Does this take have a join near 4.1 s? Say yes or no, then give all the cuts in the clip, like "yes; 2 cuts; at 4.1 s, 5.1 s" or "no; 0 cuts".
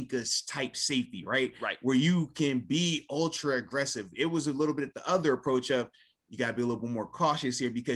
no; 0 cuts